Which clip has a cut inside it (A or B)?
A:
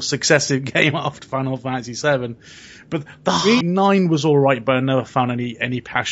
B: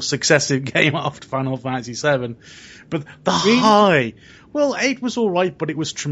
A